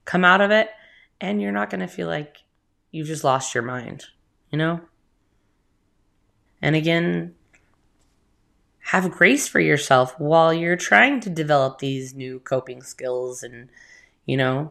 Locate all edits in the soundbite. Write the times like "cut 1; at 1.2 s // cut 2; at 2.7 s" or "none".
cut 1; at 6.5 s

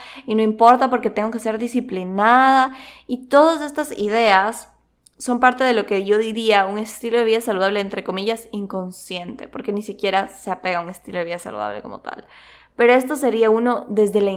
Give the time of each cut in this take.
none

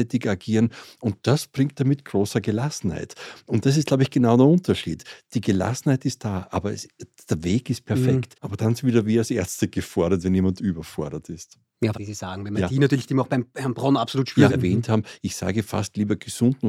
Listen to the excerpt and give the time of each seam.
cut 1; at 8.3 s // cut 2; at 11.9 s // cut 3; at 14.5 s

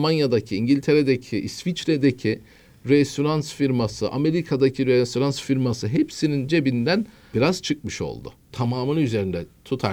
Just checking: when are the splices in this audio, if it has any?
cut 1; at 7.3 s // cut 2; at 8.5 s

